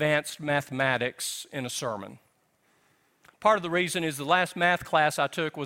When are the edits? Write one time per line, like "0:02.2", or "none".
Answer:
none